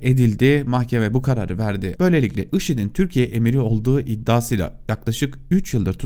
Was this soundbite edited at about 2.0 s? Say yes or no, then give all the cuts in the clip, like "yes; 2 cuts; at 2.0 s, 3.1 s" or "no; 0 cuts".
yes; 1 cut; at 2.0 s